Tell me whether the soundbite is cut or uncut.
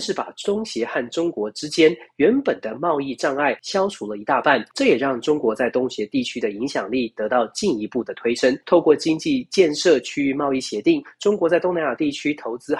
uncut